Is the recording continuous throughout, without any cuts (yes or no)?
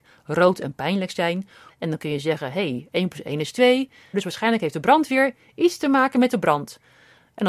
no